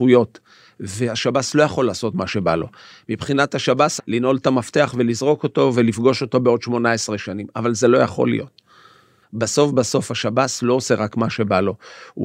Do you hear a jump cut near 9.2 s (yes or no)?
yes